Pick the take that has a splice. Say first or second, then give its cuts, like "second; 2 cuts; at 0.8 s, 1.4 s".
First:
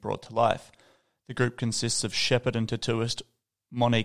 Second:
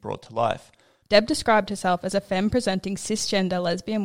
second; 1 cut; at 1.0 s